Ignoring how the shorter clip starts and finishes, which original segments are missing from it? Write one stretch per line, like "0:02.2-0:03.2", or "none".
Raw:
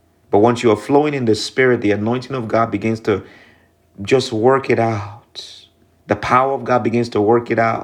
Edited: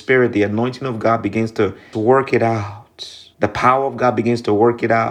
0:03.4-0:04.3
0:05.7-0:06.0